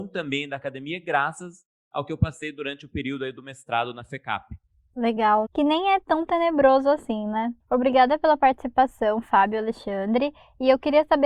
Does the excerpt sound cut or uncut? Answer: cut